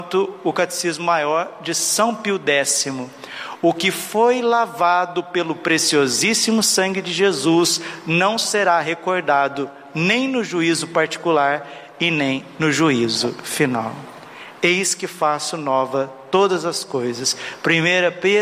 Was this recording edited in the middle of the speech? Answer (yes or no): no